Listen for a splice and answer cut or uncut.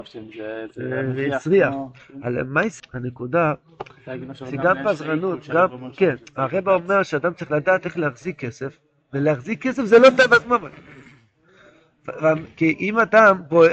cut